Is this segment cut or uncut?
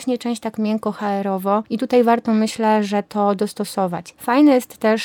cut